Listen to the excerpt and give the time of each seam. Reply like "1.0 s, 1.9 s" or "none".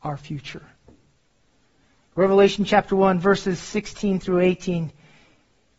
none

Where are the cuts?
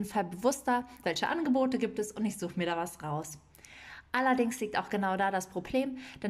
1.0 s

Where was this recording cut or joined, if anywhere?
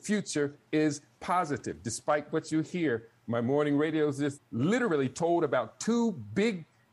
4.4 s

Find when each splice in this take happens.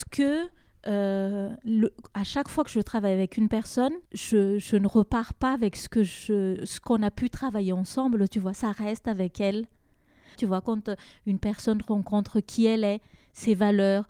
4.1 s, 10.4 s

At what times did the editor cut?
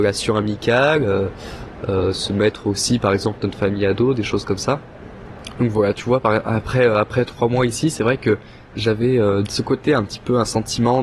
5.5 s, 9.4 s

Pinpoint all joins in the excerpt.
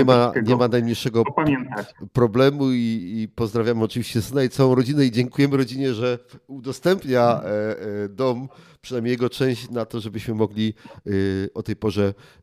none

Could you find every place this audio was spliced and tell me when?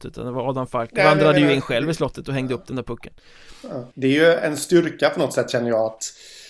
3.9 s

